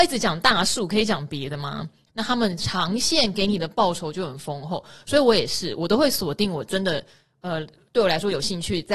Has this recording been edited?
yes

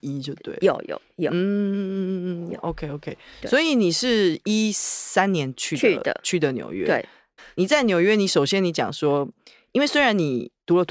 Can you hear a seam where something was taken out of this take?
yes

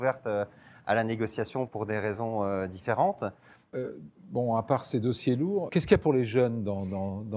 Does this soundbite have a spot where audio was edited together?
yes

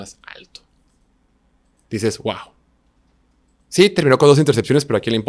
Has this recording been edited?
no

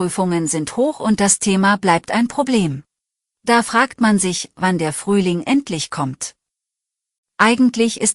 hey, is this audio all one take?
no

